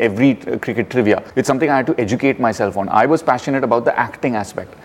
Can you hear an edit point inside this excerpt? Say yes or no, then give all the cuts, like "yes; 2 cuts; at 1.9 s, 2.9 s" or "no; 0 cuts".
no; 0 cuts